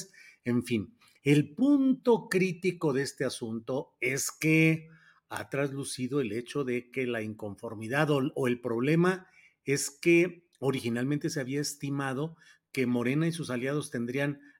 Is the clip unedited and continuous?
yes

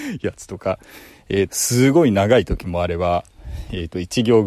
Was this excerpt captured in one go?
no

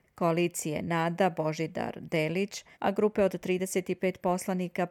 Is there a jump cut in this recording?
yes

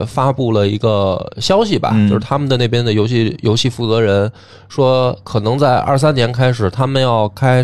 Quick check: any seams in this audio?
no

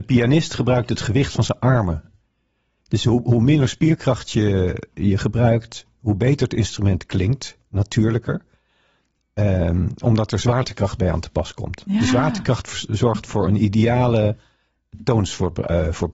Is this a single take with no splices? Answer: yes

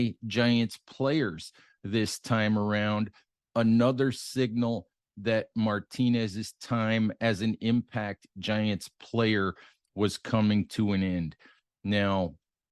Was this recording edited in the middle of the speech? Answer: no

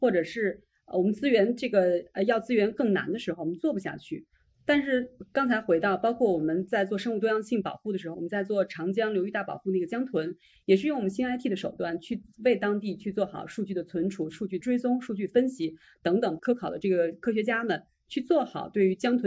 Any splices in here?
yes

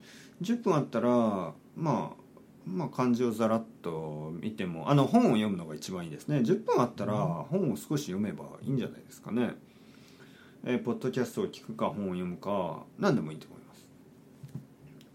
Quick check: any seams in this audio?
yes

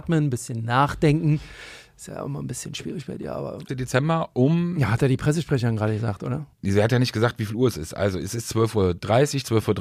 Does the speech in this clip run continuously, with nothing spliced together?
no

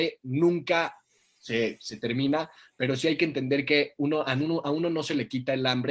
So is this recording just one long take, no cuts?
yes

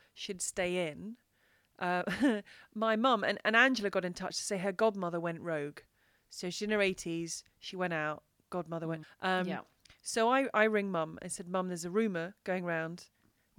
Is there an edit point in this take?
yes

